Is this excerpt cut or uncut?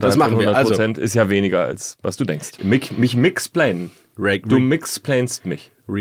cut